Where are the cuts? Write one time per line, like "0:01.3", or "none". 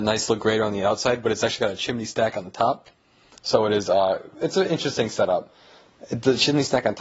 none